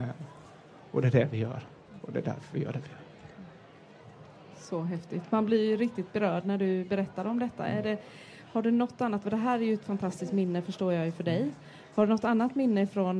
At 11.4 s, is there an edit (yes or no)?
no